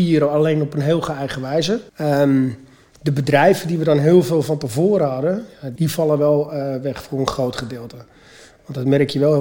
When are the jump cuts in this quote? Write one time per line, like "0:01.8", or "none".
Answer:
0:01.9
0:05.8